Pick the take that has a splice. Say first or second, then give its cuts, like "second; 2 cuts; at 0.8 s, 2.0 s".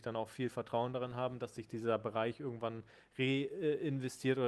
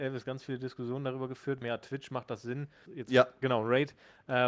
second; 2 cuts; at 1.6 s, 2.9 s